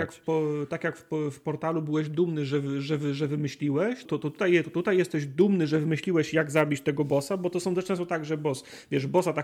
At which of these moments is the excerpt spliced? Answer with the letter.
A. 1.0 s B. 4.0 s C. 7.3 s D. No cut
B